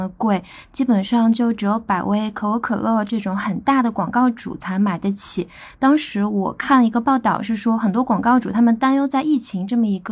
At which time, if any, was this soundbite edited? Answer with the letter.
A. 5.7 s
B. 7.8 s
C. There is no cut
A